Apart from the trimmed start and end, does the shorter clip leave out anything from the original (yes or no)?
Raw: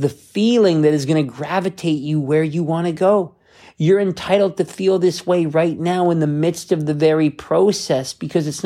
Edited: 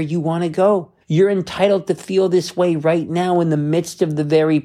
yes